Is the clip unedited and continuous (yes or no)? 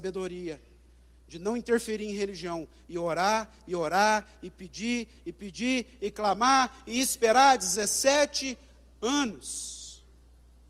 yes